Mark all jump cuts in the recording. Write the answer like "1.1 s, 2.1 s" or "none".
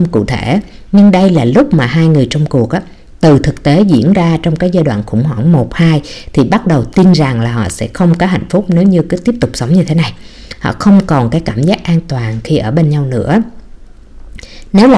none